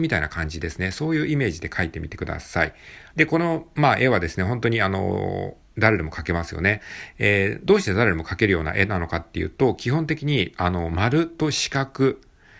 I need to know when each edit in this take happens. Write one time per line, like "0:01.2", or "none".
0:03.1